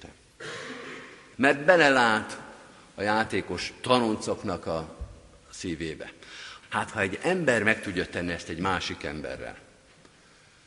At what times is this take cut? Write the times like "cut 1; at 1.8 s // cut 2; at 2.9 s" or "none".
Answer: cut 1; at 1.3 s // cut 2; at 6.6 s